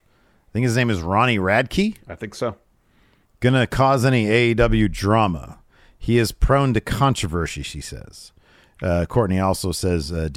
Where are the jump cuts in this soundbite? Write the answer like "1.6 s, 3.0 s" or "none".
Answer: none